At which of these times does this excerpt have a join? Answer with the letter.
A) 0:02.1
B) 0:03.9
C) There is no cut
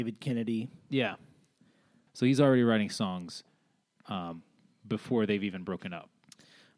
A